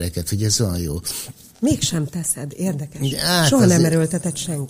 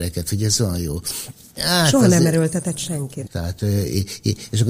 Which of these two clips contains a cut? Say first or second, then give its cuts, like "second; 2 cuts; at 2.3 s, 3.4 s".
second; 2 cuts; at 1.6 s, 3.2 s